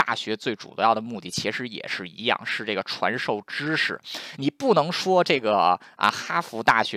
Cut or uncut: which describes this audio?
uncut